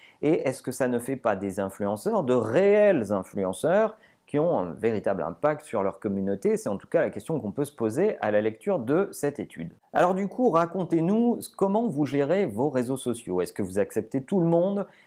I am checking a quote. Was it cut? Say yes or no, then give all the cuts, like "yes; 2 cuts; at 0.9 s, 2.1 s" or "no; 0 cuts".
no; 0 cuts